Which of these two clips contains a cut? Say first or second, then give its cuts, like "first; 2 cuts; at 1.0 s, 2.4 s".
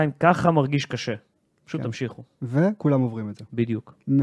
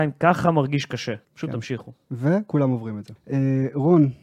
second; 2 cuts; at 1.2 s, 3.2 s